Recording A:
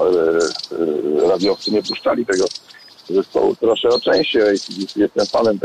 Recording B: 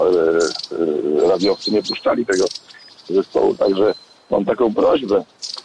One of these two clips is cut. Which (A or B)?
A